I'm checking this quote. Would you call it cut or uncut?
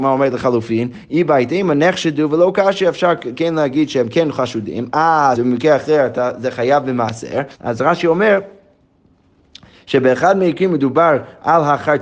cut